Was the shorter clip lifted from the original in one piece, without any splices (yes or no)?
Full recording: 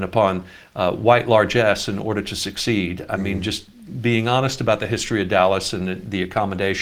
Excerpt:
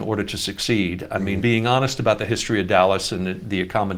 no